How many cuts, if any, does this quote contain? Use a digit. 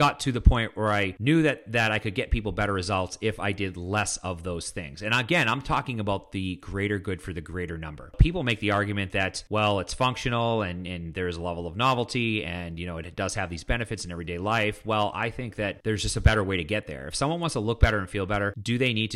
0